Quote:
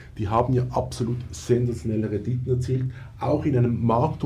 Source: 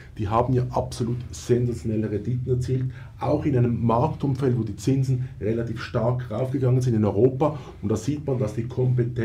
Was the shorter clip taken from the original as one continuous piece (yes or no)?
yes